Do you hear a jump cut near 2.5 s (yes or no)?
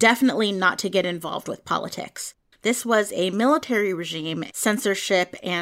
yes